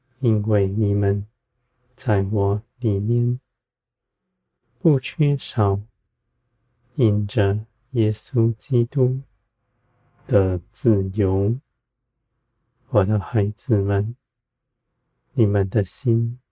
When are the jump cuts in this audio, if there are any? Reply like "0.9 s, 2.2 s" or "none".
none

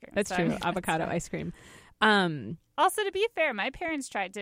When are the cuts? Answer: none

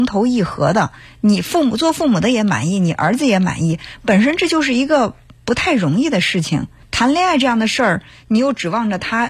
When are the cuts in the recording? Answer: 6.8 s

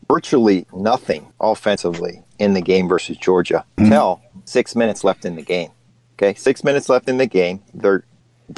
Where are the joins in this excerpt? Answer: 1.3 s, 3.8 s

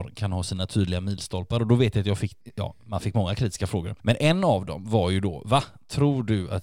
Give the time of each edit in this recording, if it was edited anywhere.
none

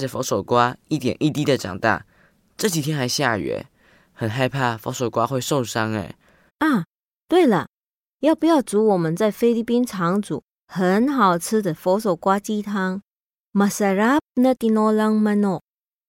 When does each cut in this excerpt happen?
6.5 s

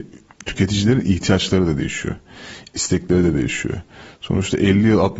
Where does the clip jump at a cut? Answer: none

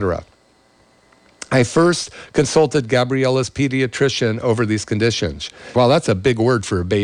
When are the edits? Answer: 5.7 s

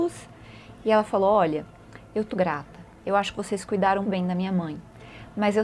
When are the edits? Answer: 2.3 s, 4.0 s

